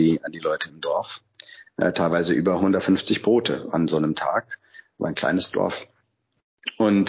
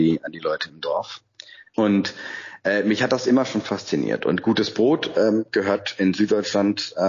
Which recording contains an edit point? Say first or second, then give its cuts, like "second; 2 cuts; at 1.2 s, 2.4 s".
second; 1 cut; at 1.7 s